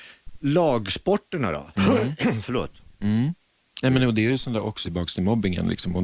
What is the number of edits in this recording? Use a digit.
2